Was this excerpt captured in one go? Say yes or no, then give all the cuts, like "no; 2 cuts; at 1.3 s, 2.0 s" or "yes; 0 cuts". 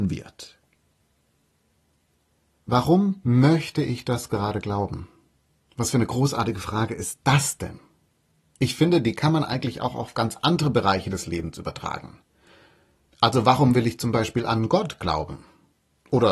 yes; 0 cuts